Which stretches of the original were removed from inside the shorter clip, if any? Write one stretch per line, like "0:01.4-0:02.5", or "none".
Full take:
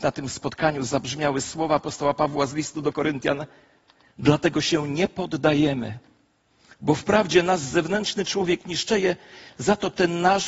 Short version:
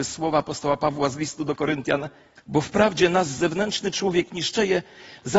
0:03.7-0:06.7